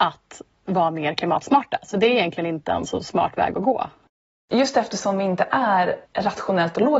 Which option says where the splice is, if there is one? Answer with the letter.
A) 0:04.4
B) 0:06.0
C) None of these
B